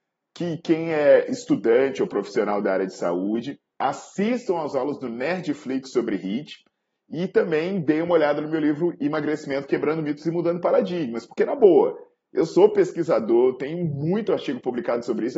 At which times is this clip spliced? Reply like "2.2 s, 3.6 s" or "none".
none